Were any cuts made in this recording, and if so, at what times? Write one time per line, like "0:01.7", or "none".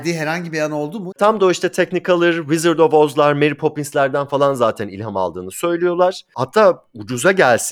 0:01.1

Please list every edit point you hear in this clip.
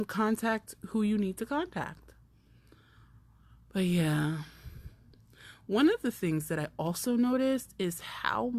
none

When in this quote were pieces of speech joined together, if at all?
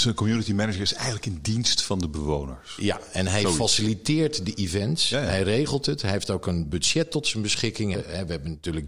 0:07.9

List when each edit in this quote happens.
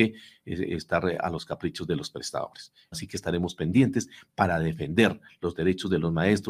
0:02.9

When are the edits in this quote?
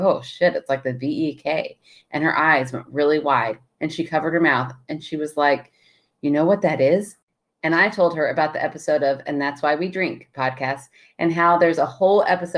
none

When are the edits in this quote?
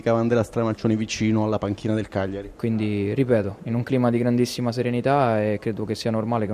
0:02.6

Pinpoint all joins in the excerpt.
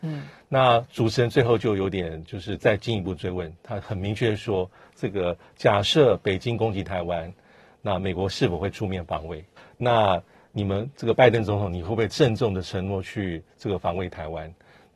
0:09.6

